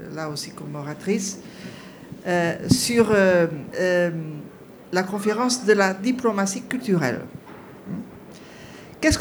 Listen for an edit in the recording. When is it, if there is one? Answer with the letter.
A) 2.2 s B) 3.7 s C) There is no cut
B